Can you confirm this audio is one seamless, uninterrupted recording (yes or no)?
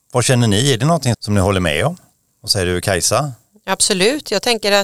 no